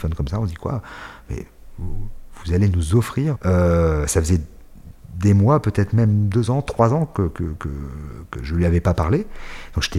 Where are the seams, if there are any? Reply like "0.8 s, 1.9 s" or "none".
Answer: 3.3 s